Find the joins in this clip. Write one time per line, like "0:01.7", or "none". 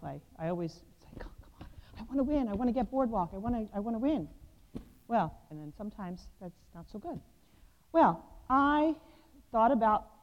0:05.5